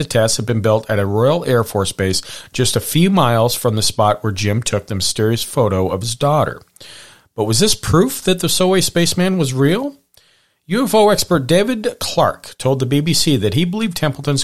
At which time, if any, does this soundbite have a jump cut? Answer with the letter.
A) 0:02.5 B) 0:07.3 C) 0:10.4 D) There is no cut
D